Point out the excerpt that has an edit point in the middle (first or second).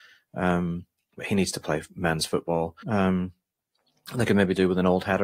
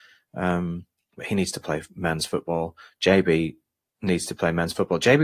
first